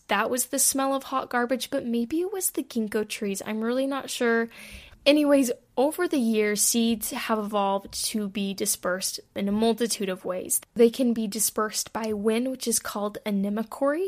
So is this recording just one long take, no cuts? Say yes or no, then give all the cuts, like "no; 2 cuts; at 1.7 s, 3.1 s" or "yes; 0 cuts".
no; 1 cut; at 4.9 s